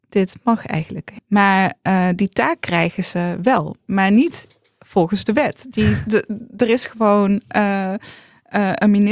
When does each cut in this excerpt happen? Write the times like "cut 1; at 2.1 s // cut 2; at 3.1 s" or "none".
cut 1; at 1.2 s

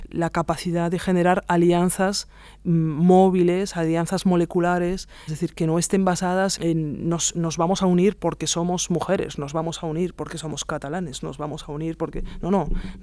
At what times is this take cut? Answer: cut 1; at 5.3 s

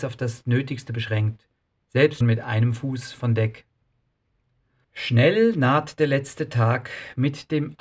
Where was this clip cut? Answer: cut 1; at 2.2 s // cut 2; at 4.8 s

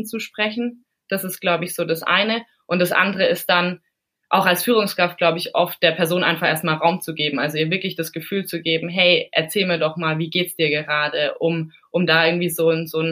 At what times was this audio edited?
none

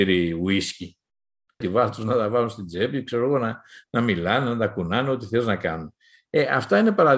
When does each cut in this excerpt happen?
cut 1; at 1.6 s

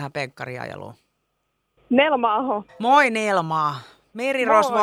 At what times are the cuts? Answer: cut 1; at 1.8 s

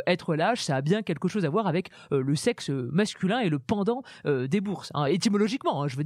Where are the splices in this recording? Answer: none

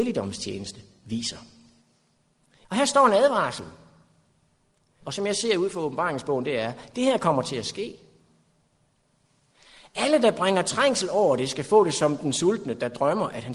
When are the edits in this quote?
cut 1; at 2.6 s // cut 2; at 5.0 s

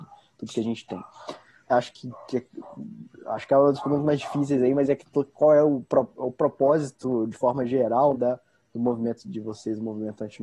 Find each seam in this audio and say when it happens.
cut 1; at 1.7 s // cut 2; at 8.1 s // cut 3; at 9.2 s

